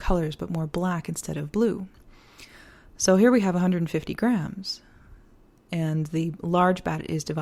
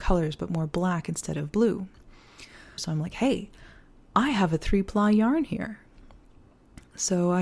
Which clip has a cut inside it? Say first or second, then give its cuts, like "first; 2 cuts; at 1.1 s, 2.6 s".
second; 1 cut; at 2.8 s